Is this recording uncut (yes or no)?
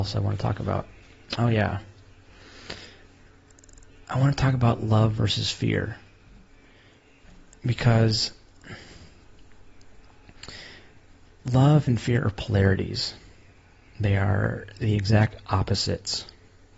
yes